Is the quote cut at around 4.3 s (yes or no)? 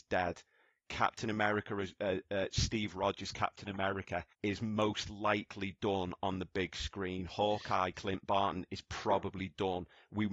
yes